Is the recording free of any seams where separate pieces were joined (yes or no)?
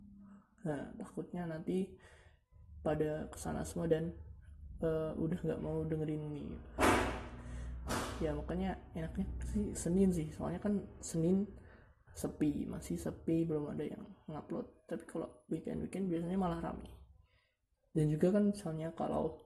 no